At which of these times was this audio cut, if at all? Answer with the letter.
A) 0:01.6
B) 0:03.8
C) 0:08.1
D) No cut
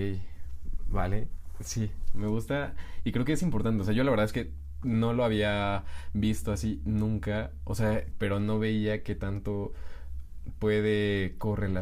C